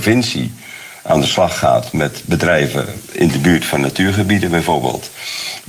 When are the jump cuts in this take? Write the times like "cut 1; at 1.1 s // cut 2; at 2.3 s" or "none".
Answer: none